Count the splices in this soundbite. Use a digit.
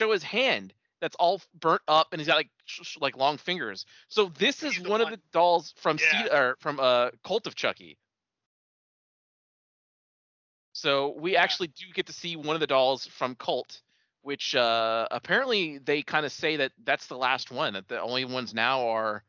0